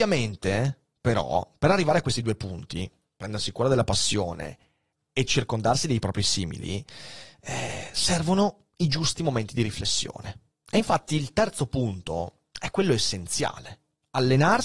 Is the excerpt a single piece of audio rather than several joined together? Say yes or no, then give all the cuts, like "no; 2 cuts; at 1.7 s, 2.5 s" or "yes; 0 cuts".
yes; 0 cuts